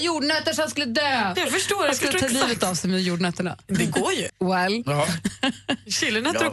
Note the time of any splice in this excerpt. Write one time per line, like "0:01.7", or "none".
0:01.3
0:04.3

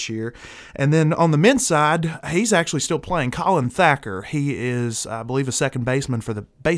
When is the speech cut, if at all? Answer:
none

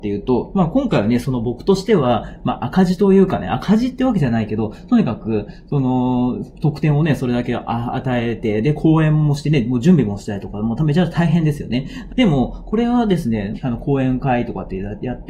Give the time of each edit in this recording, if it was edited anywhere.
0:12.1
0:13.5

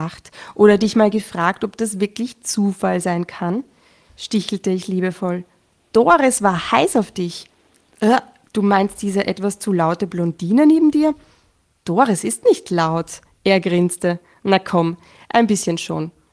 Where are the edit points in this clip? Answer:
none

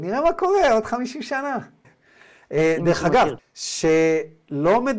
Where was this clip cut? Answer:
0:01.8
0:03.4

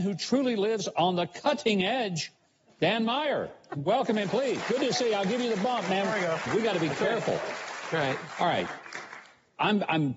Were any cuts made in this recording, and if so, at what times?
0:04.6
0:06.5
0:07.9

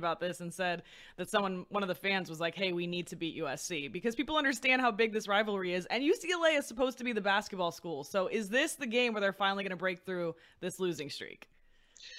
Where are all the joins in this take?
none

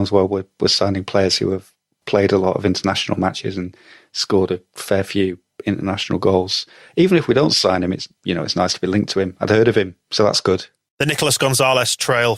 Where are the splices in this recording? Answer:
none

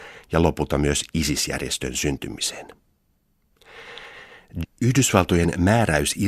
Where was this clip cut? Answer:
0:04.6

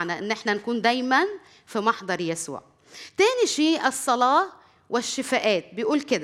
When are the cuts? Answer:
none

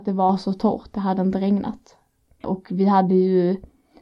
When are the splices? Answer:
0:02.4

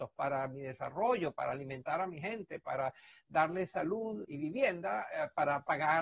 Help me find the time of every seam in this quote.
0:04.2

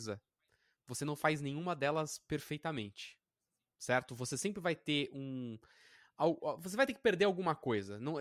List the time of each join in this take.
none

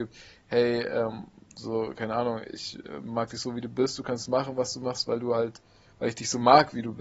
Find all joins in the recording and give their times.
none

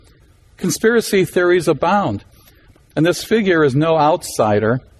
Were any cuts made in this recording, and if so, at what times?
0:02.7

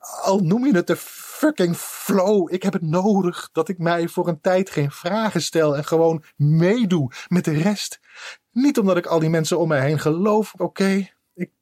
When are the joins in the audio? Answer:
0:10.6

